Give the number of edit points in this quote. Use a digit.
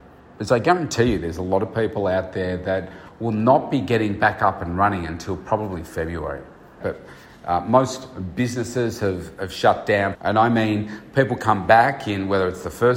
2